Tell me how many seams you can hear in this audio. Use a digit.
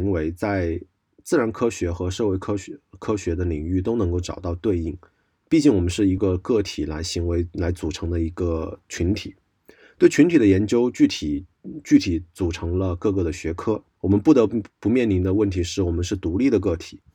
2